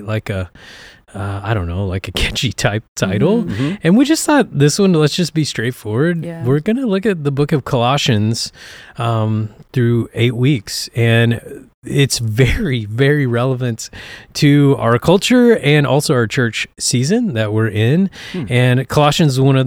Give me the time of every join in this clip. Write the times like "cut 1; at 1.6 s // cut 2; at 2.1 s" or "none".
none